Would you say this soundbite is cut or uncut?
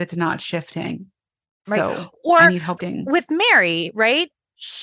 cut